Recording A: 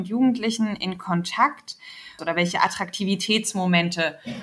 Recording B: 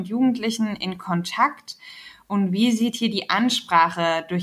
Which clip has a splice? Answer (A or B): A